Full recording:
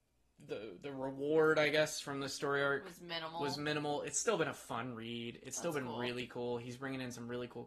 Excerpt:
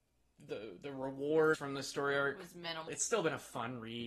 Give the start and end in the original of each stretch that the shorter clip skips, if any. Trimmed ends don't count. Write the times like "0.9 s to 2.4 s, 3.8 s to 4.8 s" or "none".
1.5 s to 2.0 s, 3.3 s to 4.0 s